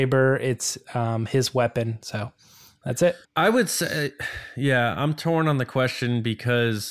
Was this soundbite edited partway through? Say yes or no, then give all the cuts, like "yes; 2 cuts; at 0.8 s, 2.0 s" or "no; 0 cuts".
yes; 1 cut; at 3.2 s